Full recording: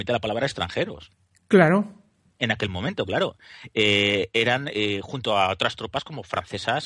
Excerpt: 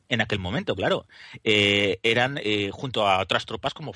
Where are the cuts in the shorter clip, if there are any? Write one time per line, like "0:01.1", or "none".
none